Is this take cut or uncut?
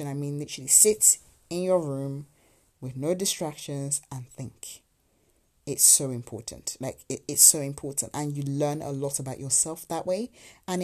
uncut